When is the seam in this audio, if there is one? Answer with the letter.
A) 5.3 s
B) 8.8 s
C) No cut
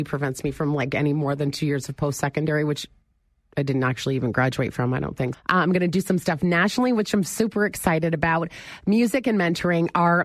A